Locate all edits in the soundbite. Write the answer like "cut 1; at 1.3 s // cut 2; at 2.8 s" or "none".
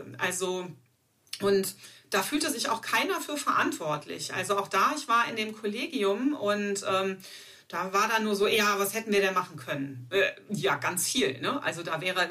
none

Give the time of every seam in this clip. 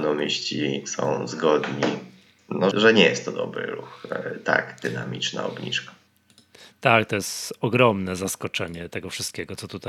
cut 1; at 2.7 s

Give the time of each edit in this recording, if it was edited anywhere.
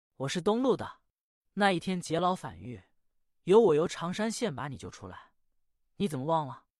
cut 1; at 1.4 s // cut 2; at 5.8 s

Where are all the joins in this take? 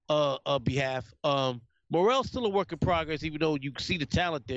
none

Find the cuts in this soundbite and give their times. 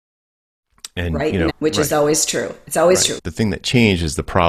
cut 1; at 1.5 s // cut 2; at 3.2 s

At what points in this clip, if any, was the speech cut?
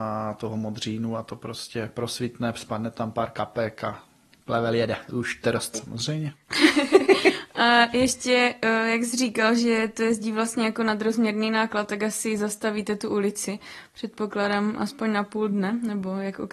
cut 1; at 5.7 s

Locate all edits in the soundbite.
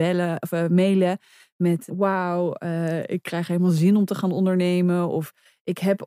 cut 1; at 1.9 s

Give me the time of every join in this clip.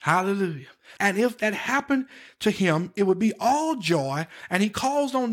cut 1; at 1.0 s

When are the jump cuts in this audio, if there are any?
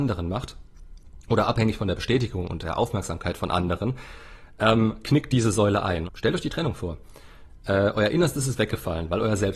cut 1; at 6.1 s

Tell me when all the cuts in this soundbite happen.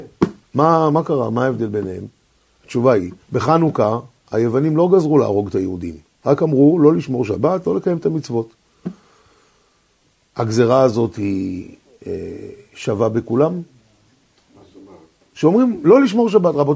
cut 1; at 3.2 s

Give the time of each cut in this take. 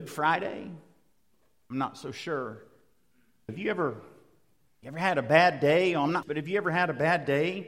cut 1; at 3.5 s // cut 2; at 6.2 s

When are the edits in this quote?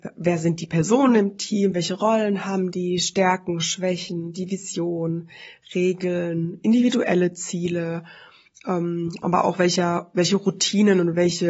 none

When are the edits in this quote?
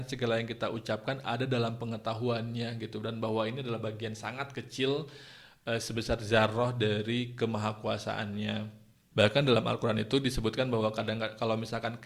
cut 1; at 9.1 s

